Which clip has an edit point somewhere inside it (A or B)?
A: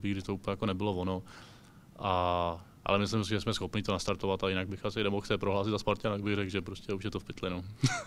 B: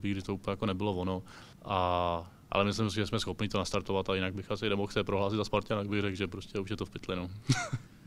B